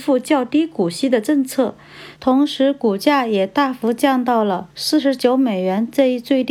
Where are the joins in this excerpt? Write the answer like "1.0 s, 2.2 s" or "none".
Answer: 2.2 s